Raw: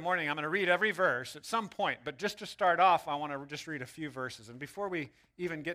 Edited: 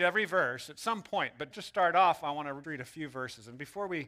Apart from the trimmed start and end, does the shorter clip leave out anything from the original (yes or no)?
yes